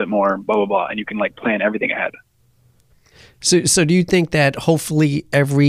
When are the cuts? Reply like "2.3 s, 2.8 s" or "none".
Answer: none